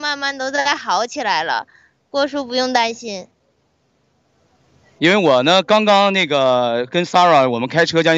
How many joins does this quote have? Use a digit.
1